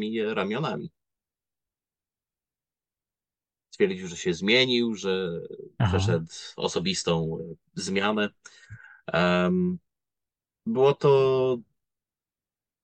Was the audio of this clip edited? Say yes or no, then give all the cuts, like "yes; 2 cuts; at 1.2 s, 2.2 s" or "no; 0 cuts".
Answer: no; 0 cuts